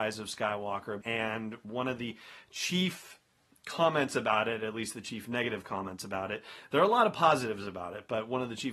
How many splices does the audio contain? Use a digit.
1